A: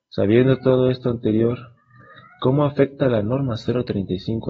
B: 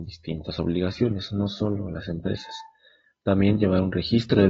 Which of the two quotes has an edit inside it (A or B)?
B